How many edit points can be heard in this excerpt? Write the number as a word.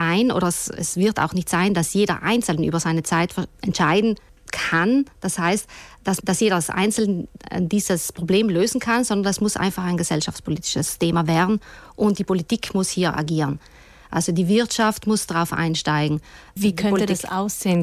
one